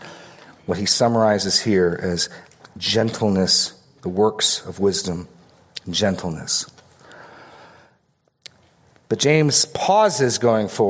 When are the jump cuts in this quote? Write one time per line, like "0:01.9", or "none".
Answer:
none